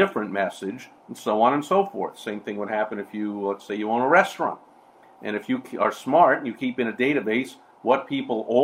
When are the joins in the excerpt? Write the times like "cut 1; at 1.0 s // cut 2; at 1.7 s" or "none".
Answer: none